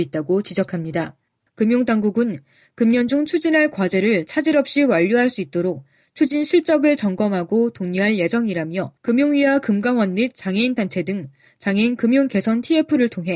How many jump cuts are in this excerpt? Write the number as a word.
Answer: two